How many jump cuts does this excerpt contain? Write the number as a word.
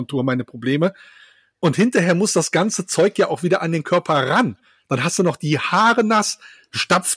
zero